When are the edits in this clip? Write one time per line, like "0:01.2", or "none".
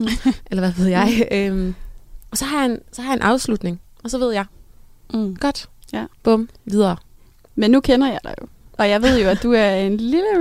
0:06.1